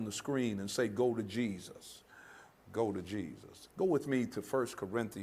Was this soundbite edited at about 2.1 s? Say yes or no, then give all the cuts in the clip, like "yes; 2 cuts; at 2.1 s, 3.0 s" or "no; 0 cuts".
no; 1 cut; at 3.7 s